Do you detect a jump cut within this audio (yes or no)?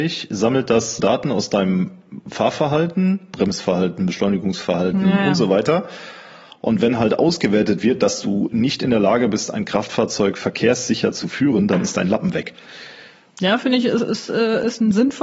yes